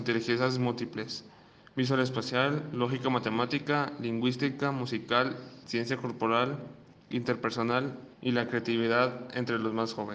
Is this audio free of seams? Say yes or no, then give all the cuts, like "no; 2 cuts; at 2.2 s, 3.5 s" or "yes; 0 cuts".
no; 2 cuts; at 5.6 s, 8.1 s